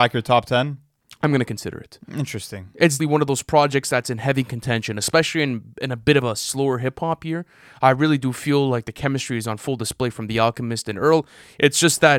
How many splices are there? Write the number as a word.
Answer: one